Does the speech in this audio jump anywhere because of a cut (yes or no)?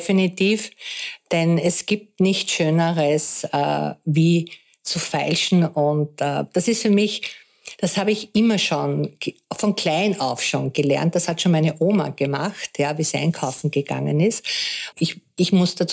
yes